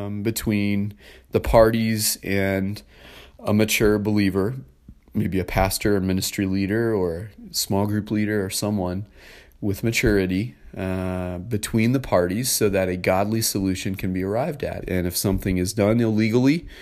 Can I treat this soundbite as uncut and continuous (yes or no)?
no